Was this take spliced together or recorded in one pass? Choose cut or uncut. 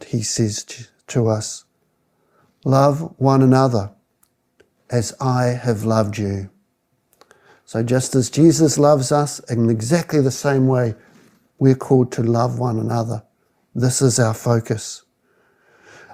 uncut